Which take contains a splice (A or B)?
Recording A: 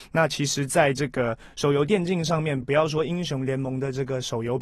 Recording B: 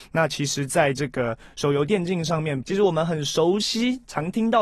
B